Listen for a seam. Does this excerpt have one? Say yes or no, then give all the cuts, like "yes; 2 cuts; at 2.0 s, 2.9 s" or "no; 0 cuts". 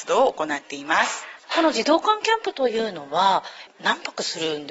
yes; 1 cut; at 1.4 s